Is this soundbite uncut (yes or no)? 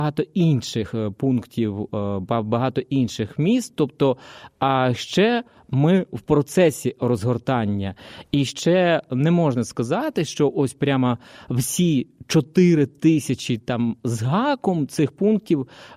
yes